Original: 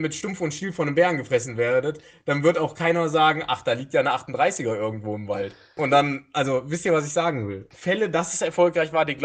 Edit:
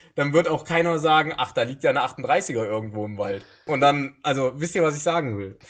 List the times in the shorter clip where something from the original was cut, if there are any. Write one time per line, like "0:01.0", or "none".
none